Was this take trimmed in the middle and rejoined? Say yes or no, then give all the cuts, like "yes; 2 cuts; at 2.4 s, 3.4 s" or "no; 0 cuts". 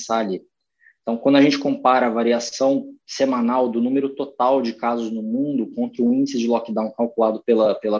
no; 0 cuts